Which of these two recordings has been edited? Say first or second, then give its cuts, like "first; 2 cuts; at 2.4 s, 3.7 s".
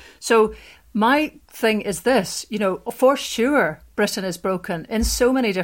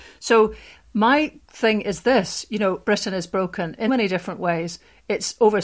second; 2 cuts; at 2.8 s, 3.9 s